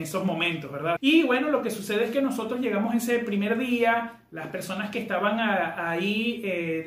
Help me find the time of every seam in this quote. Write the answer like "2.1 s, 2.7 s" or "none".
1.0 s